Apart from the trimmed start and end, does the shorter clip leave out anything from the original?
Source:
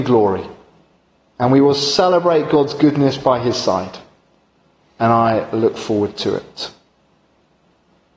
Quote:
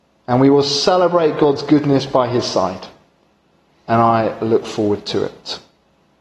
no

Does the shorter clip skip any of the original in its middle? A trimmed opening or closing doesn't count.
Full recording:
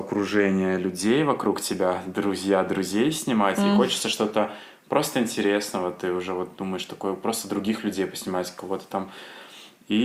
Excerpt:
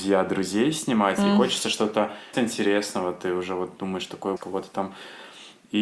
yes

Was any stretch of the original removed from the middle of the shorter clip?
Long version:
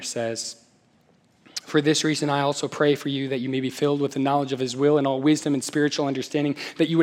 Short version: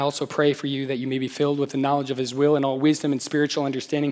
no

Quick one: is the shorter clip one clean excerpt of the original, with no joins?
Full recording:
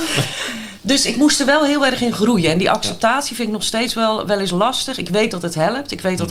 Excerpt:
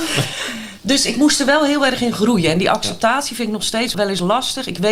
no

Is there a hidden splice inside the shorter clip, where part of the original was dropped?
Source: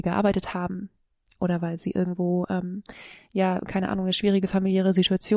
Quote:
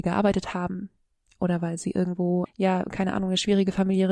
yes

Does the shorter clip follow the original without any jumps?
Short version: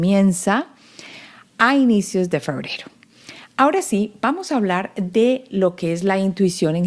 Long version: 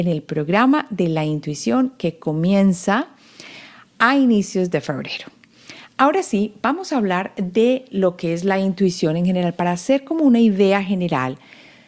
yes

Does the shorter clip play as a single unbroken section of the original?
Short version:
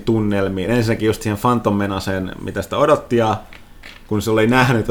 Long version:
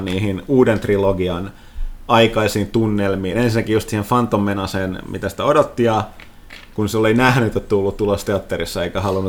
yes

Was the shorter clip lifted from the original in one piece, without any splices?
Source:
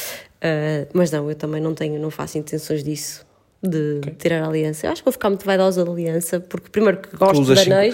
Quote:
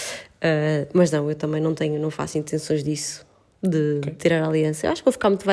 yes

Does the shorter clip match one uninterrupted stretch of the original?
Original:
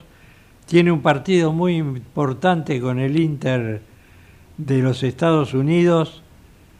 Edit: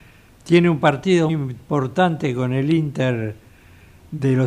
no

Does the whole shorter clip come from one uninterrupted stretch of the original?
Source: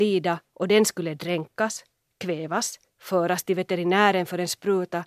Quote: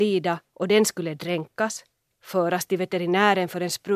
no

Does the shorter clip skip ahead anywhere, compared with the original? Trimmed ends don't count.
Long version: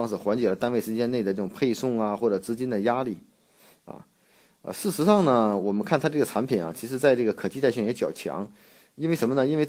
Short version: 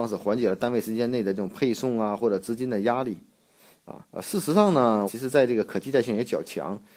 yes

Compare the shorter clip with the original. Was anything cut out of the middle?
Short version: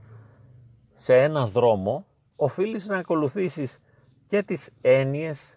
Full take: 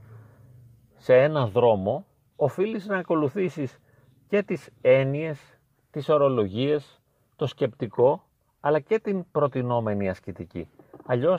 no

